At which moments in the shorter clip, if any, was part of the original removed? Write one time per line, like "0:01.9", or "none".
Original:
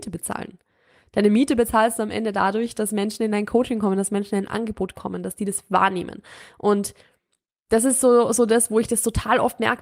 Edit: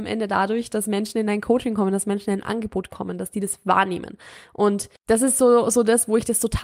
0:05.0